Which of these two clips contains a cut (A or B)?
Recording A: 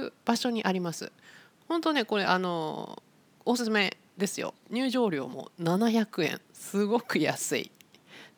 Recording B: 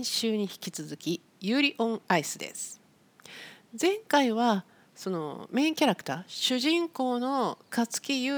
A